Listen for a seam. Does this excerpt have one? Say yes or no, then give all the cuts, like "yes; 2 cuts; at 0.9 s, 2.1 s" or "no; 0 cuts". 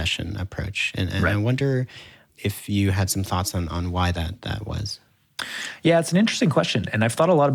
no; 0 cuts